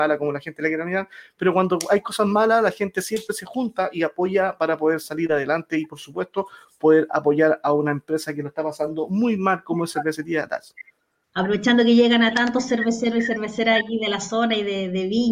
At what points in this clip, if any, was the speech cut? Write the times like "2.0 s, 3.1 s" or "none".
11.2 s

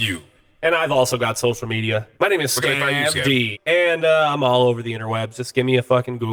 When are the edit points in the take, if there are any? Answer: 2.1 s, 3.5 s

